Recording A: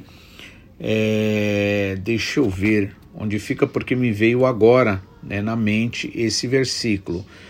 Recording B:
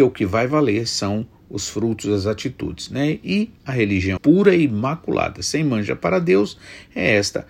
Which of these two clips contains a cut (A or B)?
B